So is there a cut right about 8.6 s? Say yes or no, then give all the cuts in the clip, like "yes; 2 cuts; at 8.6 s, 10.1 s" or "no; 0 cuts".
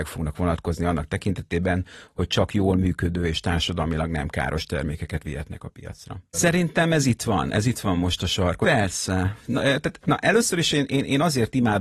yes; 2 cuts; at 6.3 s, 8.6 s